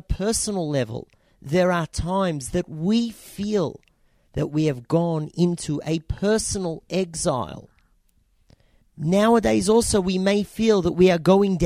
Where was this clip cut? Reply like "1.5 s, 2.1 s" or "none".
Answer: 8.8 s